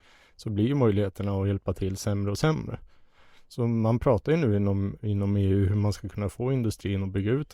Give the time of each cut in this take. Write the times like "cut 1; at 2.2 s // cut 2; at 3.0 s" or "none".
none

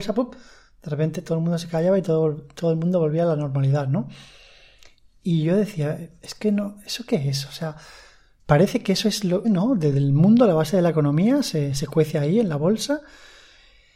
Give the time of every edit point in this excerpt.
cut 1; at 9.4 s

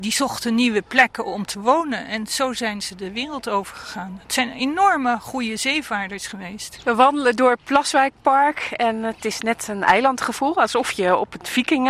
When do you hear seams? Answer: none

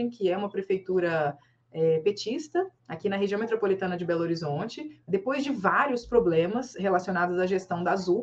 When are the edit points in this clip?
cut 1; at 2.8 s // cut 2; at 5.1 s

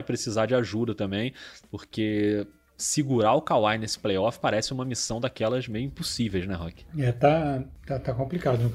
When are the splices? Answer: none

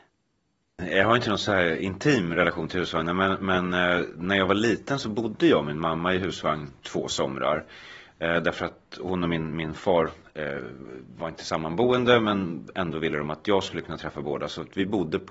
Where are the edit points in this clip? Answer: none

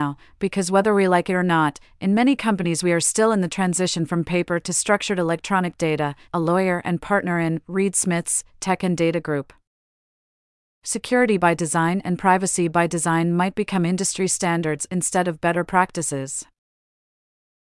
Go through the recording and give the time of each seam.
cut 1; at 6.3 s // cut 2; at 10.8 s

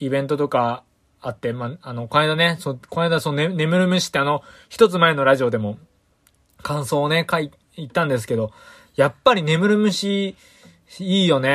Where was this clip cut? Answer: none

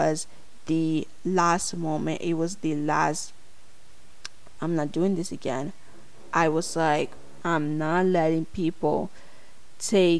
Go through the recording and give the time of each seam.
cut 1; at 4.6 s

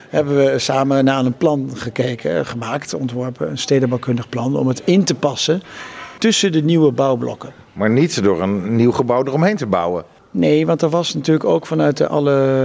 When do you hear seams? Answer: none

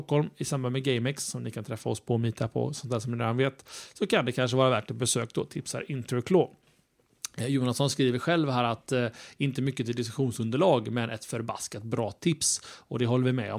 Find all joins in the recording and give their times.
none

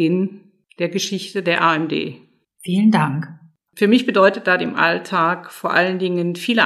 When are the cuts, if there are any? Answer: cut 1; at 3.7 s

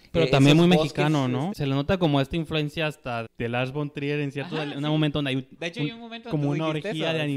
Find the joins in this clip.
cut 1; at 1.5 s // cut 2; at 3.3 s

